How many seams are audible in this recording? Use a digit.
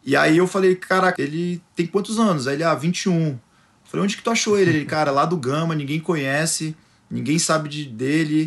1